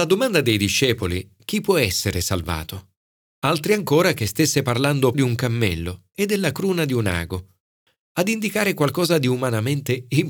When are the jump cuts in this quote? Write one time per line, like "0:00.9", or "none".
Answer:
0:01.4
0:03.3
0:05.1